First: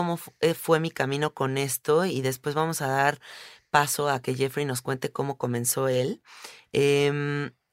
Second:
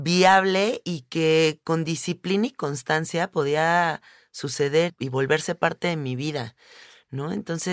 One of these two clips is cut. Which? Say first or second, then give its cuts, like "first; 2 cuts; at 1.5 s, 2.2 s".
second; 1 cut; at 4.9 s